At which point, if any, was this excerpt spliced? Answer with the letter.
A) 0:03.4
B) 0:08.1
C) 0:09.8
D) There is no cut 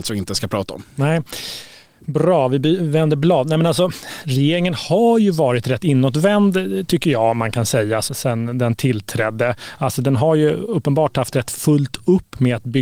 B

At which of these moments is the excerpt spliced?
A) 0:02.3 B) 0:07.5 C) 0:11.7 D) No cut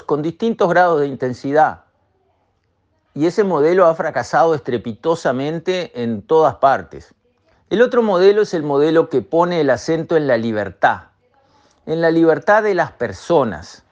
B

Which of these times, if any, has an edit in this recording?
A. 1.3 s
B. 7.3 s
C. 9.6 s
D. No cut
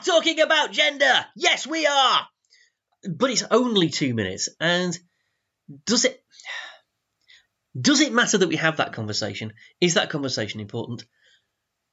D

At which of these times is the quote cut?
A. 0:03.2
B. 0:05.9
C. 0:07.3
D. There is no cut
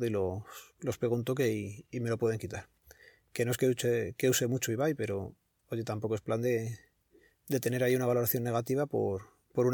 D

